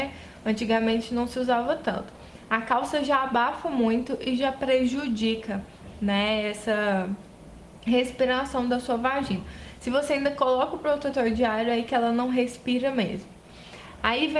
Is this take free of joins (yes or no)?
yes